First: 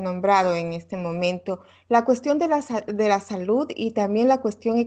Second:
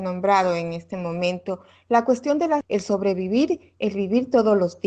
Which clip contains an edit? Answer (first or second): second